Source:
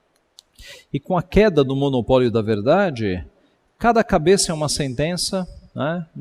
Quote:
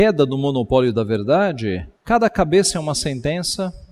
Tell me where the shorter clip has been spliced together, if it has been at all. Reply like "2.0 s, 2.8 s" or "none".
2.0 s